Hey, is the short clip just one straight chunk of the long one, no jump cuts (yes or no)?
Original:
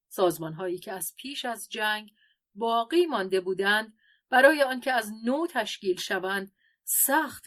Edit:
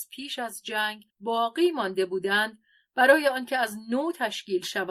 no